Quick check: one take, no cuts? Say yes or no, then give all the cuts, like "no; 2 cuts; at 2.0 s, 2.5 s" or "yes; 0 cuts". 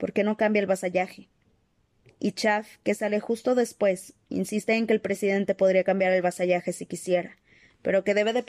yes; 0 cuts